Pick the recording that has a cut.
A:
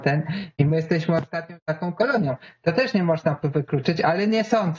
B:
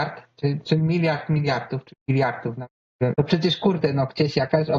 B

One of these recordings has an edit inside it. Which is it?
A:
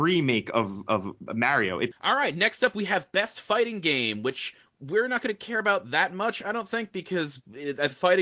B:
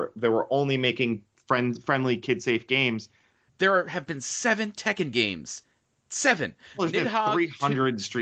B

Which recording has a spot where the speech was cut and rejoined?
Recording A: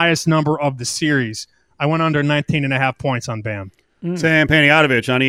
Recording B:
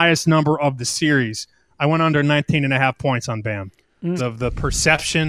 B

